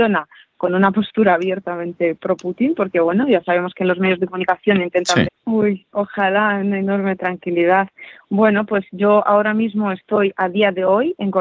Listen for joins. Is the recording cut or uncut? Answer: cut